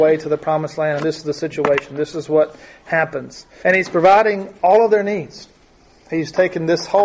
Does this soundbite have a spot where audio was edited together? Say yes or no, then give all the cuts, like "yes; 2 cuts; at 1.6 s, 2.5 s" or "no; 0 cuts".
yes; 1 cut; at 3.6 s